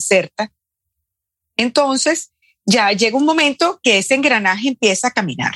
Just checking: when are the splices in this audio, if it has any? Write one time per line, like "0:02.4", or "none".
none